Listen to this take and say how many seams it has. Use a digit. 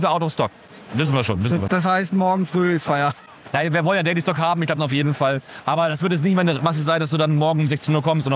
1